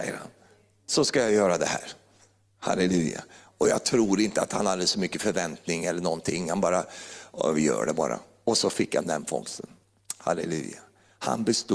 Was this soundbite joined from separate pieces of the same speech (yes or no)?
no